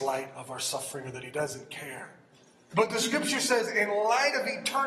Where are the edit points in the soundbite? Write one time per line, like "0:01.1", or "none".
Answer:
0:02.7